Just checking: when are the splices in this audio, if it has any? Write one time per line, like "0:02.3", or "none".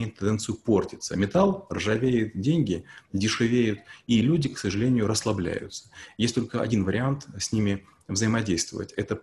none